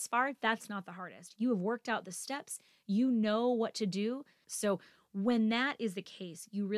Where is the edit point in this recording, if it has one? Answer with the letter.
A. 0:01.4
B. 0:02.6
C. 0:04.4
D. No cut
C